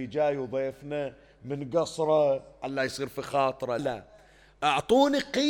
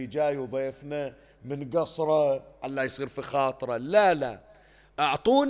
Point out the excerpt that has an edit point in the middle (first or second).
first